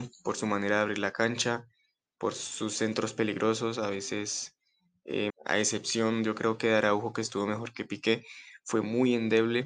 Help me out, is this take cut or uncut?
cut